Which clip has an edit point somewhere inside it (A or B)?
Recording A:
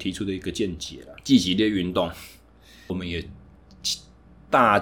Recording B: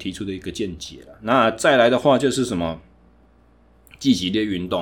A